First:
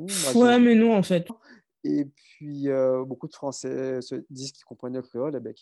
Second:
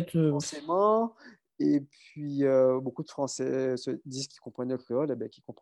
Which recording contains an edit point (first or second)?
first